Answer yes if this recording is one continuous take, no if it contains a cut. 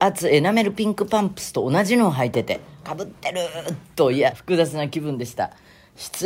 no